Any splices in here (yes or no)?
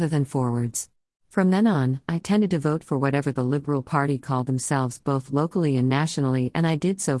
yes